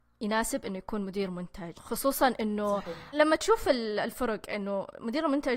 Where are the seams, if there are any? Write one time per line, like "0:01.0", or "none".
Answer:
0:03.1